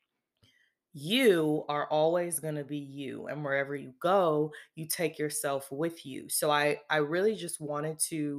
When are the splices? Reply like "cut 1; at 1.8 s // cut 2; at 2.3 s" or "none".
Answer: none